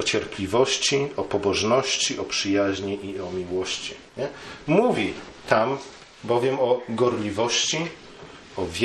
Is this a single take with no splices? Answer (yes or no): no